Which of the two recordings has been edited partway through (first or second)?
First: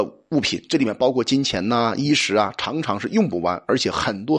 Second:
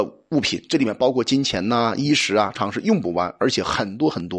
second